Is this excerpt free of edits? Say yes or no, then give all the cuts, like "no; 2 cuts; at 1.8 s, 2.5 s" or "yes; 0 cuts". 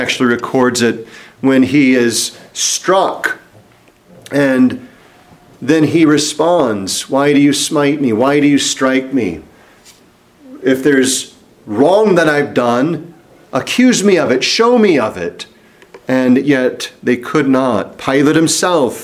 yes; 0 cuts